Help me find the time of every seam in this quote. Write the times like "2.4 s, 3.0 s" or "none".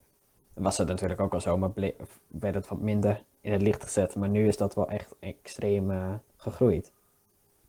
6.3 s